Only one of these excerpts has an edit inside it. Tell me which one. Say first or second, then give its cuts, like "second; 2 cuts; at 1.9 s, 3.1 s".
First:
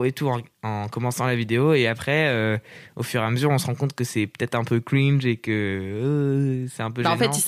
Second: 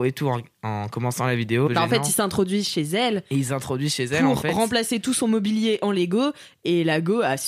second; 1 cut; at 1.7 s